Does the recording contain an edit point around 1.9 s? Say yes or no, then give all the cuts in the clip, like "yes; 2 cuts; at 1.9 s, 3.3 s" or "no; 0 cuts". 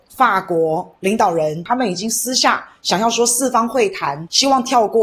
no; 0 cuts